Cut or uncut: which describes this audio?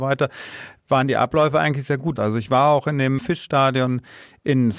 cut